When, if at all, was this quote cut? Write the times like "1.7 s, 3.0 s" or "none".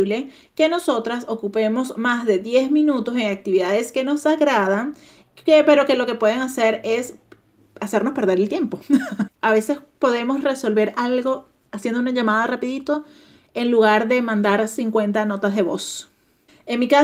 9.3 s